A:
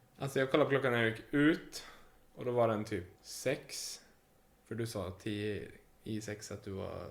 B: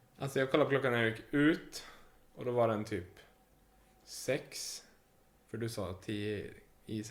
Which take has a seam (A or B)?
A